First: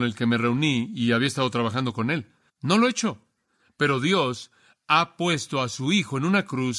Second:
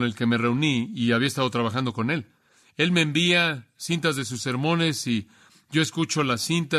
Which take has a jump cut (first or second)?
first